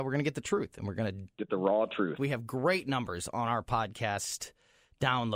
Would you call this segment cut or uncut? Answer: cut